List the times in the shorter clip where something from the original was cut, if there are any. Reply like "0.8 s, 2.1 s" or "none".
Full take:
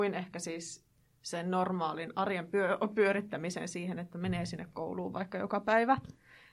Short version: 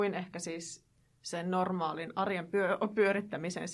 none